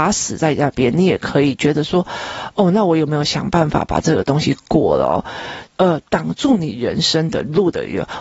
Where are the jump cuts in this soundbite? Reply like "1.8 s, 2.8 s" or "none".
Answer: 5.6 s